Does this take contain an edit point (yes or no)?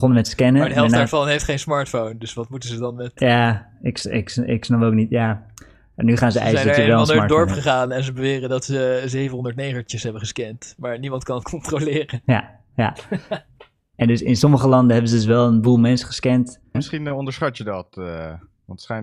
yes